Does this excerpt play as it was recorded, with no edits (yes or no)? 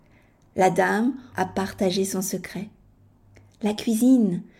no